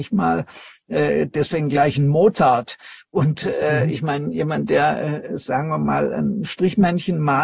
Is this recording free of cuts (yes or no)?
yes